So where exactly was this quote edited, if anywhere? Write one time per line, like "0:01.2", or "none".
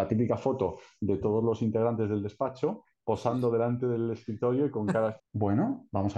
0:05.2

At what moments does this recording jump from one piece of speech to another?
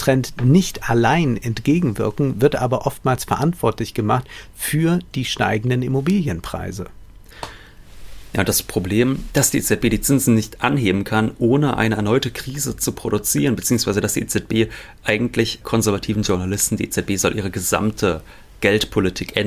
0:15.6

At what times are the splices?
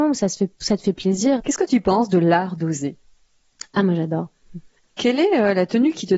0:01.4
0:04.8

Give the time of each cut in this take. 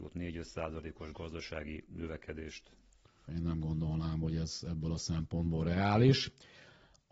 0:03.3

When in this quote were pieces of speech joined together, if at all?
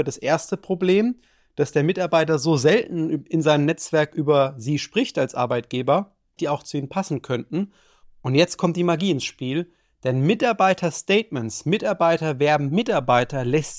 0:06.4
0:08.0

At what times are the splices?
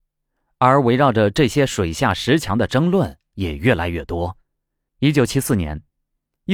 0:04.9

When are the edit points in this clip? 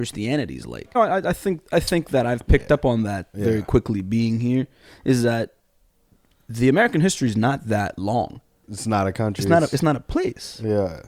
0:00.9
0:08.6

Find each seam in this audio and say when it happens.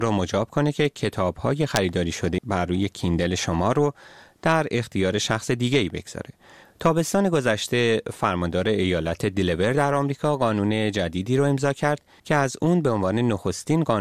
0:06.6

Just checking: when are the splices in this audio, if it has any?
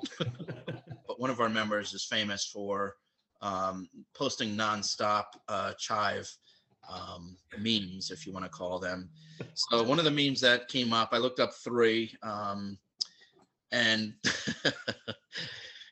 0:01.0

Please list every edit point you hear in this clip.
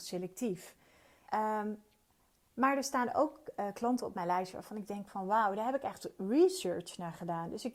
0:01.3

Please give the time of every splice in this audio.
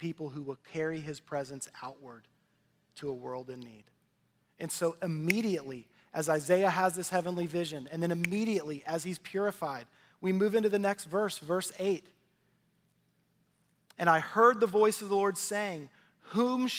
none

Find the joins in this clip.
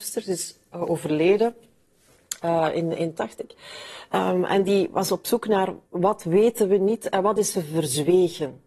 0:03.1
0:05.8

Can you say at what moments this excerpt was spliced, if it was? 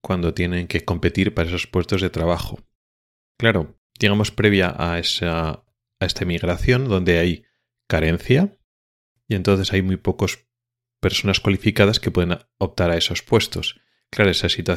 0:03.9

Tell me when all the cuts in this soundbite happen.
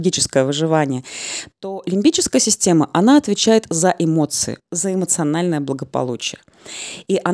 none

